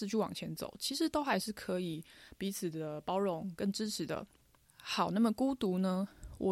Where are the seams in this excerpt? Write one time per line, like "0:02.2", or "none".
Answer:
0:04.6